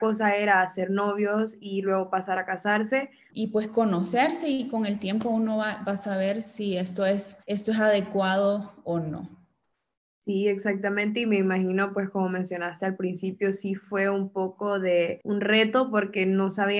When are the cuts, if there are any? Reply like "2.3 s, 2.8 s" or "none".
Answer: 3.3 s